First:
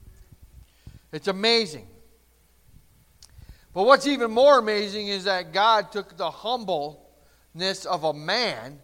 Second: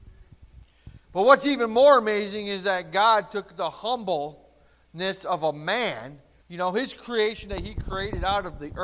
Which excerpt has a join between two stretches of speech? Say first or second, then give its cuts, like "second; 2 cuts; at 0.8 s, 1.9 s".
second; 2 cuts; at 1.0 s, 6.4 s